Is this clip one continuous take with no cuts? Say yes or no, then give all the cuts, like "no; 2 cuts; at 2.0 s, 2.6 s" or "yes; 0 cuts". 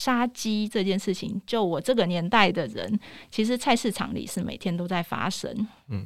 yes; 0 cuts